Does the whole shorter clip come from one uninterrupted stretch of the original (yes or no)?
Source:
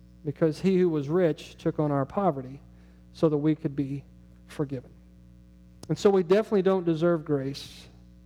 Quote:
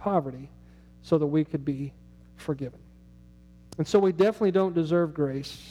yes